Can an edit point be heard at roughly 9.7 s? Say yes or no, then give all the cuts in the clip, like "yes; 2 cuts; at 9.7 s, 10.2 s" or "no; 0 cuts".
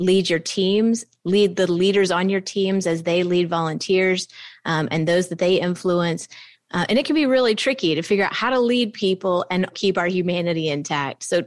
yes; 2 cuts; at 6.5 s, 9.7 s